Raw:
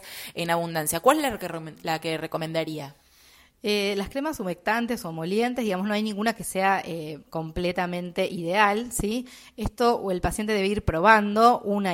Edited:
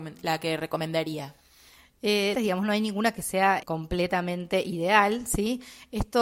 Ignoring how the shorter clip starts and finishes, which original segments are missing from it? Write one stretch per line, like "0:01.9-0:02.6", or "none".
0:03.9-0:05.6
0:06.8-0:07.3

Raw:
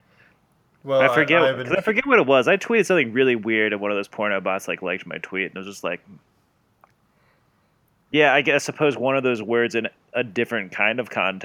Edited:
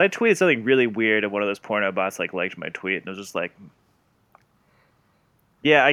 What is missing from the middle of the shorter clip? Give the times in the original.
none

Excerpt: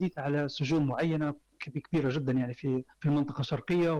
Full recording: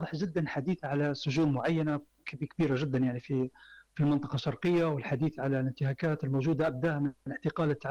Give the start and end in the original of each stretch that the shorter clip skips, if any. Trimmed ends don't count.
0:03.6-0:03.9

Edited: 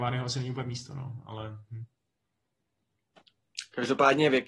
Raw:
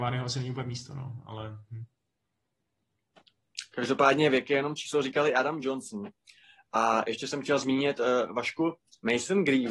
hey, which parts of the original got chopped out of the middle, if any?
none

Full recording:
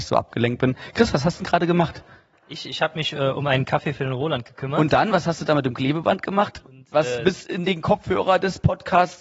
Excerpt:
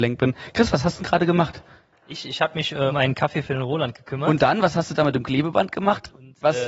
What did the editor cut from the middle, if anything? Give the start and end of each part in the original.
0:03.3-0:03.4

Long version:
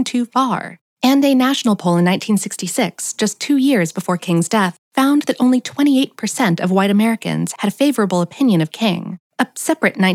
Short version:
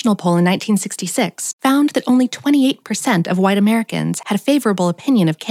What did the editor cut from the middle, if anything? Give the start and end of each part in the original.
0:03.1-0:04.8

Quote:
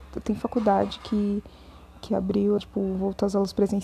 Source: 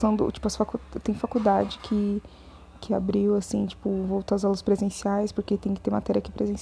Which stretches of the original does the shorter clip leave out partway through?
0:03.4-0:03.7

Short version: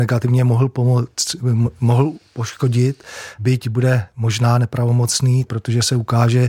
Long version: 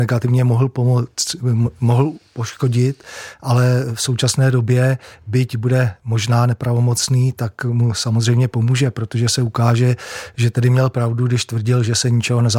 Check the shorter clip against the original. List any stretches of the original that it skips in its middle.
0:03.4-0:05.2
0:07.3-0:08.9

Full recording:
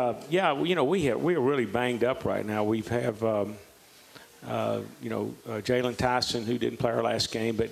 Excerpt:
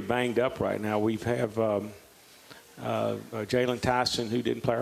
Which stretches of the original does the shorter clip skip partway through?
0:05.0-0:05.5

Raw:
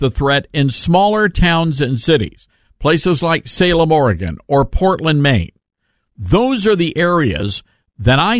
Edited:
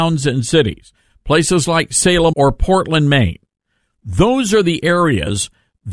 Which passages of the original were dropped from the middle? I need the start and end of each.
0:03.9-0:04.5

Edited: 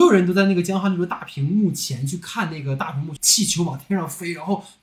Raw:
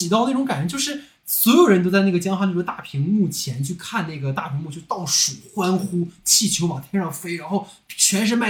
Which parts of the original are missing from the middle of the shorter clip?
0:04.7-0:06.2

